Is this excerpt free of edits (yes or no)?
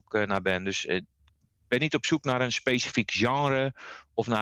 yes